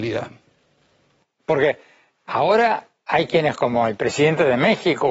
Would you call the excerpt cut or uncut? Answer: cut